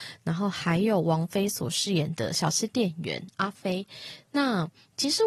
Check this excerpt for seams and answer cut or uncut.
cut